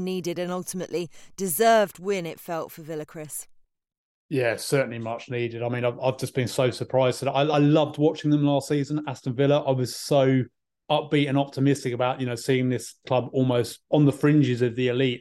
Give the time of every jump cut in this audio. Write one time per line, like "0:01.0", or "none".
none